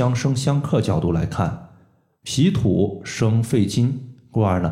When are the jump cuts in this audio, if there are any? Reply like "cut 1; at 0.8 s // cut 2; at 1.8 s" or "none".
none

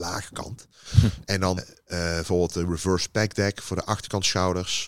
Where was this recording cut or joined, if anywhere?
cut 1; at 1.6 s

